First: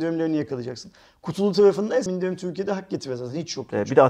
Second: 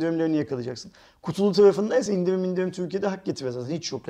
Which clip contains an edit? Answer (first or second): first